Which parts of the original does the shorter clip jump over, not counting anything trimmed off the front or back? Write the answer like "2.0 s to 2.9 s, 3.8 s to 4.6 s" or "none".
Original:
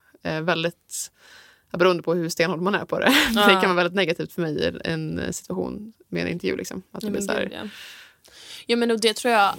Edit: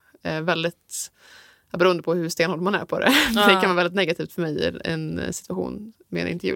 none